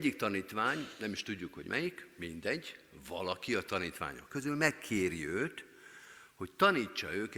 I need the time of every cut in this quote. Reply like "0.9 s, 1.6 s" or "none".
none